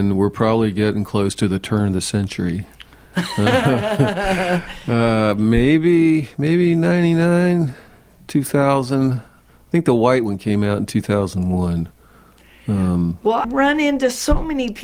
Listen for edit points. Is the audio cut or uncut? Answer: cut